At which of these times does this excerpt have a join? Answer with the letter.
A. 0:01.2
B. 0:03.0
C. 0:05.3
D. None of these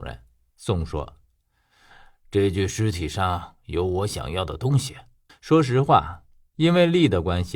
C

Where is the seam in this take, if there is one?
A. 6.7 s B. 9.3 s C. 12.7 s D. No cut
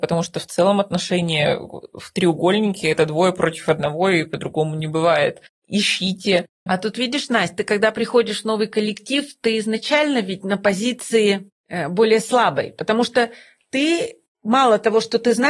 A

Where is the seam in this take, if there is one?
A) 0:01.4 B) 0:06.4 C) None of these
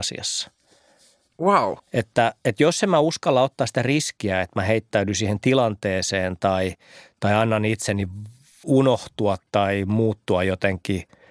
C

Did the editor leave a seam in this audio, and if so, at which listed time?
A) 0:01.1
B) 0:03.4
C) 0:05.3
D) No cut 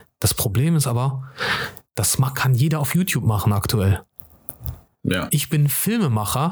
D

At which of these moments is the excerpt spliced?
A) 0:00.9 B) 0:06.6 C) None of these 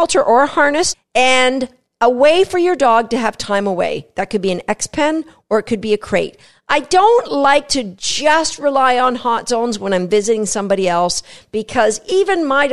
A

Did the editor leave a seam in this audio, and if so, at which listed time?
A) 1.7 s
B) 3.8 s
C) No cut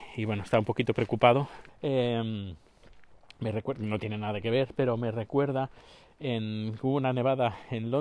A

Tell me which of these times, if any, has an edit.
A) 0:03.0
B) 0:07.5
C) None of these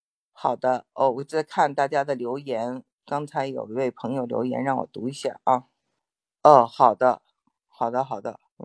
C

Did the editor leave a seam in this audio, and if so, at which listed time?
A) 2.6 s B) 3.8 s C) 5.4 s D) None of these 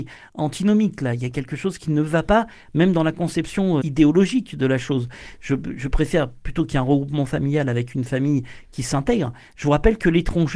B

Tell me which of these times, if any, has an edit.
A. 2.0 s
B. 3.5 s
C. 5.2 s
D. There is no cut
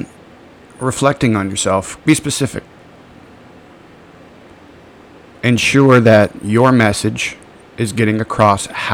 A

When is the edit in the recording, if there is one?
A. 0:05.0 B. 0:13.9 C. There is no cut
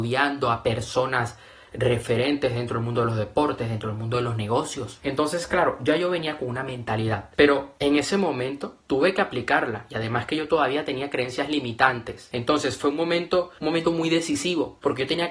C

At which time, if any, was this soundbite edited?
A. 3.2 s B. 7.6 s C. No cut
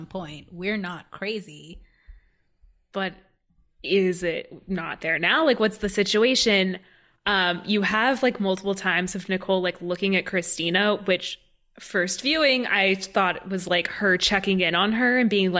C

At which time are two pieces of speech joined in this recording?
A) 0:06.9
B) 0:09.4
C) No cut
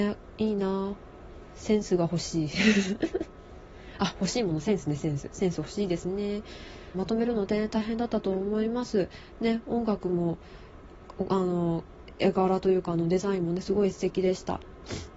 A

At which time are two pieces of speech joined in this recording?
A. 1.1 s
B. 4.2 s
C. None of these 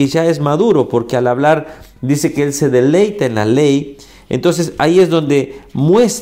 C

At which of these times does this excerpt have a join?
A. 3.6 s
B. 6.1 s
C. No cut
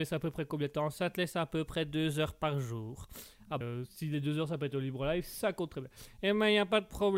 A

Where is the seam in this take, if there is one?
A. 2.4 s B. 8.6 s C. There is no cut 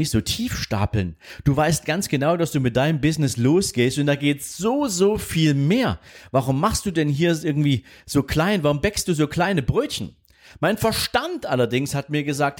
C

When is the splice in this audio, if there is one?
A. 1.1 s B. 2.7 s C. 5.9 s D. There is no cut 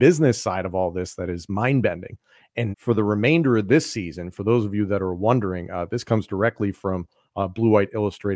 B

